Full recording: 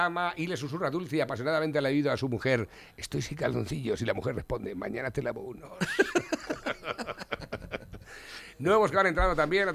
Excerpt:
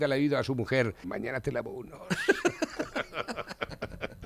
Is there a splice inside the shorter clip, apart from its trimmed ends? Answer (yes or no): yes